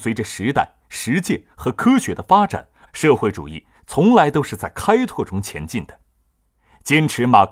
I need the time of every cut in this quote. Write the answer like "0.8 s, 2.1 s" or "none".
2.9 s